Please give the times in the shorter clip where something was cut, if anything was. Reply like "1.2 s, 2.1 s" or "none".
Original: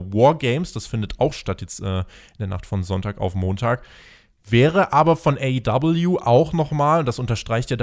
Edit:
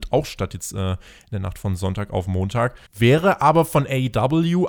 2.9 s